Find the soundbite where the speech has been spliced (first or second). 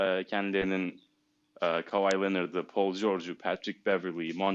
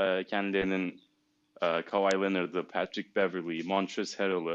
second